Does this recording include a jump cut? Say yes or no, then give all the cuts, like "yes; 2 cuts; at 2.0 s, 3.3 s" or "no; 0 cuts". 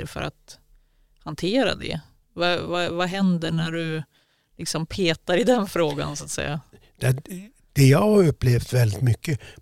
no; 0 cuts